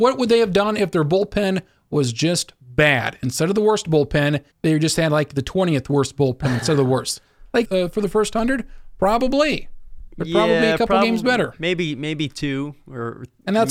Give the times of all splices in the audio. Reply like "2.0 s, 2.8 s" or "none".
4.5 s, 7.6 s